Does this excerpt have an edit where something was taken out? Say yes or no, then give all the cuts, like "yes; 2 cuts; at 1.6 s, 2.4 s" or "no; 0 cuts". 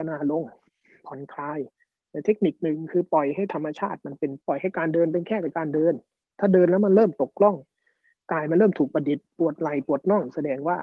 yes; 1 cut; at 4.4 s